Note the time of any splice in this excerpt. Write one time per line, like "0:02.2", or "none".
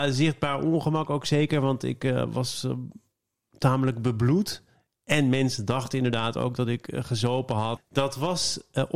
0:07.8